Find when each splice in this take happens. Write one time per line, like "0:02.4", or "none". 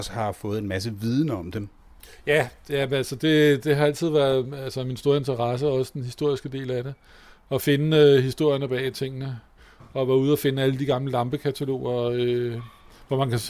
none